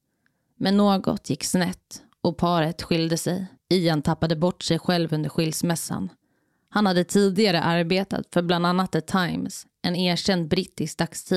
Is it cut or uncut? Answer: cut